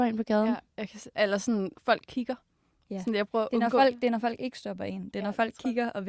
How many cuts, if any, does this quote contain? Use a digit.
0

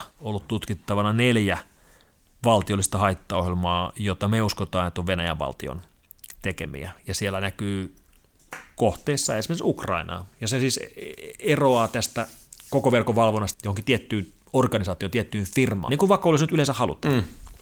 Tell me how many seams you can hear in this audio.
3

